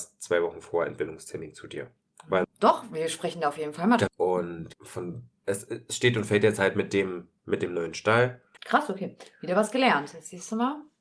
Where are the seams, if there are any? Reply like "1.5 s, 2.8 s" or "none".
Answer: 2.4 s, 4.1 s, 8.6 s